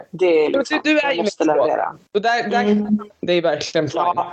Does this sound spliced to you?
yes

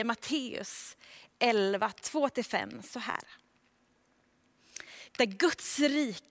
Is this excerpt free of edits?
no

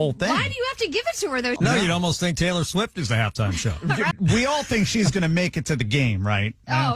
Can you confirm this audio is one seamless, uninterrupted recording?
no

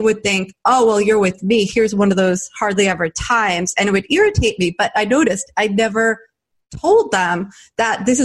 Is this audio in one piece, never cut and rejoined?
yes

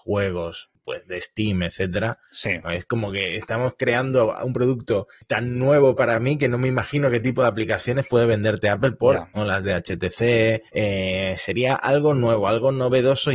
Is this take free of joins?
no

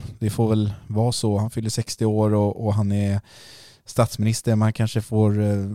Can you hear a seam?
no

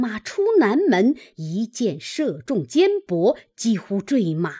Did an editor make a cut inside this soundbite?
yes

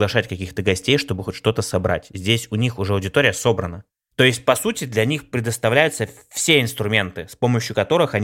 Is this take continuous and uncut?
yes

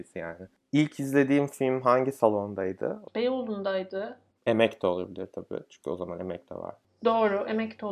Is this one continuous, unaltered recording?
no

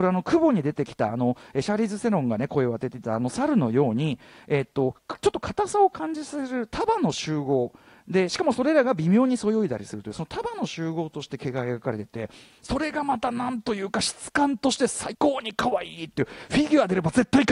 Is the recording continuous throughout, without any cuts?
no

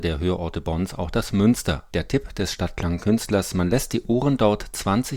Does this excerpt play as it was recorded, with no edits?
no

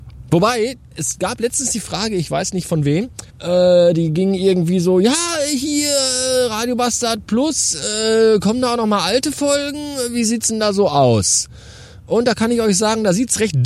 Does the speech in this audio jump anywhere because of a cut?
yes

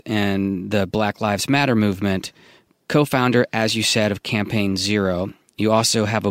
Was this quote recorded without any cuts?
yes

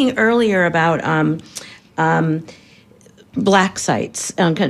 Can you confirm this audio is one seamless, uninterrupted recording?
yes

